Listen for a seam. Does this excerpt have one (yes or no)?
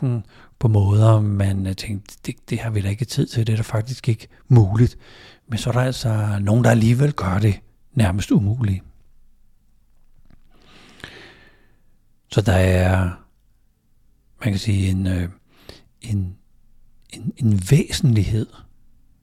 no